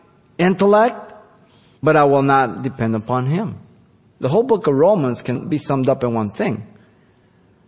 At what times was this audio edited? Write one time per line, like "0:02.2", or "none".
0:04.1